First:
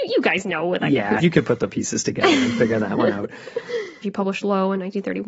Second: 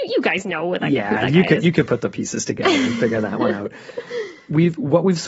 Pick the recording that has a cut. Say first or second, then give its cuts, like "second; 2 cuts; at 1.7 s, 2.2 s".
first; 2 cuts; at 1.2 s, 4.0 s